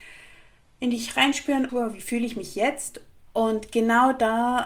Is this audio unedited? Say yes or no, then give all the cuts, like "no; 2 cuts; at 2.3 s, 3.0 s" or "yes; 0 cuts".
no; 2 cuts; at 1.7 s, 3.3 s